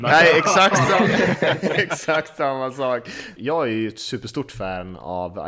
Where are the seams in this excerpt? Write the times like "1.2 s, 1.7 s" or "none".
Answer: 3.4 s